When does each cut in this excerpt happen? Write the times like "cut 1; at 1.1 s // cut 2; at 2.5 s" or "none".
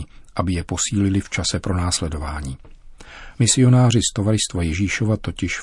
cut 1; at 3.4 s